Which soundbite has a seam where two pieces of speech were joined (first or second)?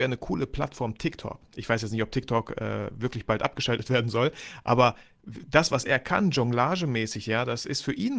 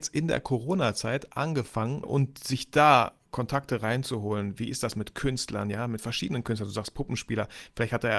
second